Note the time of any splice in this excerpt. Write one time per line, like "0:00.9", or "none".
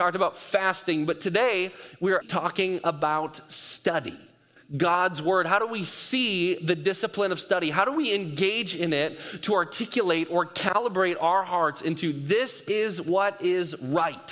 0:02.2
0:04.6